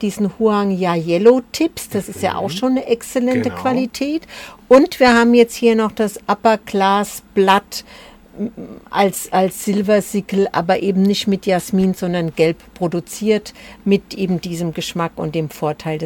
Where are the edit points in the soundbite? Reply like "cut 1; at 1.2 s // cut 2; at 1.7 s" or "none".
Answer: none